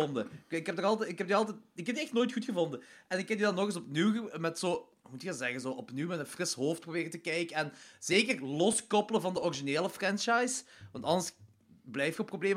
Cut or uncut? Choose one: uncut